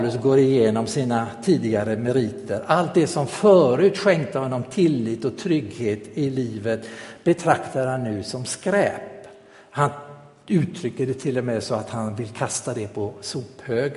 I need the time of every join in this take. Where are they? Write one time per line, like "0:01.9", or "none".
none